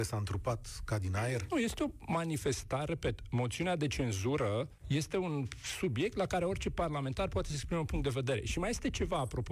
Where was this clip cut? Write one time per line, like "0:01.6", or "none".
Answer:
0:04.8

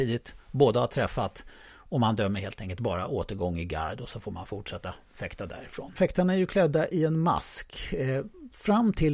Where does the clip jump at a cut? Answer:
0:06.0

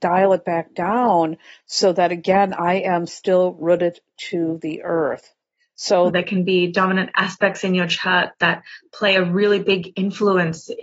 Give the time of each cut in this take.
0:06.1

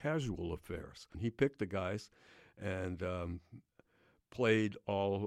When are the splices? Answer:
0:01.1

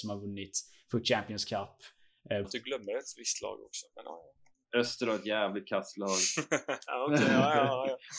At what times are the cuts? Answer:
0:02.4

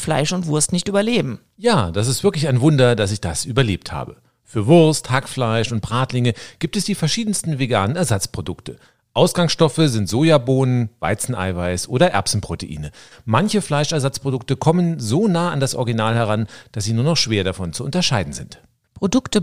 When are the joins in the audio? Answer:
none

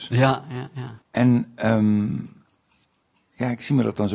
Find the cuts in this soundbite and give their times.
0:01.0

